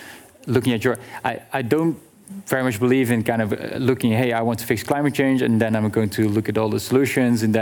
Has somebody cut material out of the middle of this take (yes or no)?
no